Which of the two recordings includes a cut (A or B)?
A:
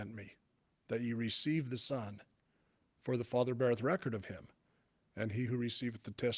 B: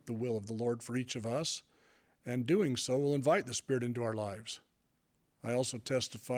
B